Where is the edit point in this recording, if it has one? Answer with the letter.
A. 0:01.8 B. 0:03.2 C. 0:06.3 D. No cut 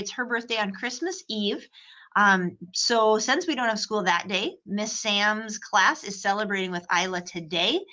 D